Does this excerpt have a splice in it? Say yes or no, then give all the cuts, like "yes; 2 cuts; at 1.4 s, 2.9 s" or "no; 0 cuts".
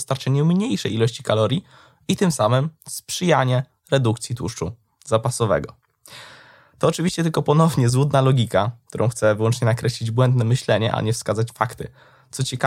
no; 0 cuts